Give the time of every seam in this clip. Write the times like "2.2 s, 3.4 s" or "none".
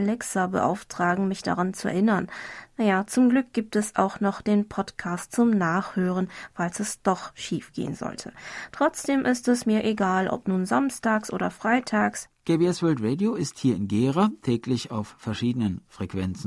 12.3 s